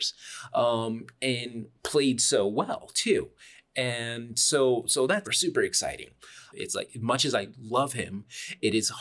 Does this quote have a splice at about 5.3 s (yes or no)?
yes